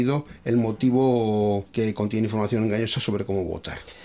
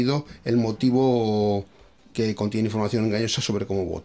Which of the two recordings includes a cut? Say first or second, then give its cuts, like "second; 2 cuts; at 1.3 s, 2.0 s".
first; 1 cut; at 1.7 s